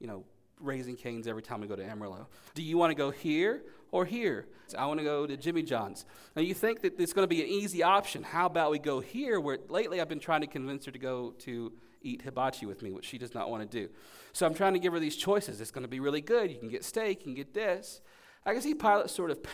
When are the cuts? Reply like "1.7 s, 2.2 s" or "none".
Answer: 2.5 s, 4.7 s